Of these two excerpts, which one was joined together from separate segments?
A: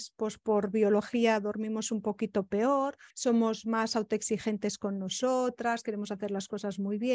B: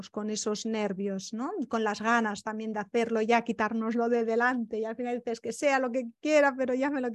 A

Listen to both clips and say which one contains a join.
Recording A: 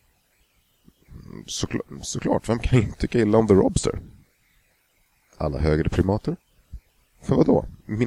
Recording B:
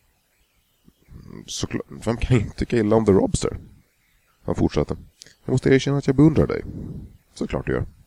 B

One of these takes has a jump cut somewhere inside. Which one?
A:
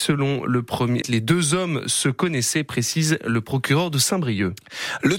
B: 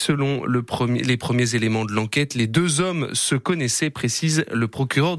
A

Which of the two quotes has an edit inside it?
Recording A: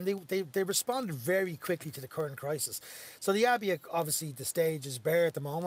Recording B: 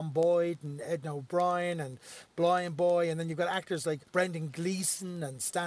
B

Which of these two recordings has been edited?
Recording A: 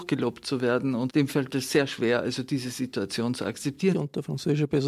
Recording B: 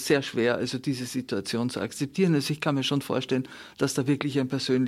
A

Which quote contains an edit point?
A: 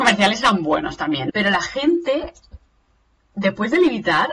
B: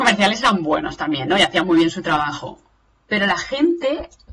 A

